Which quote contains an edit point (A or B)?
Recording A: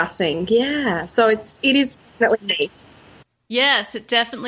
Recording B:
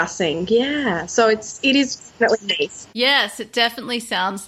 B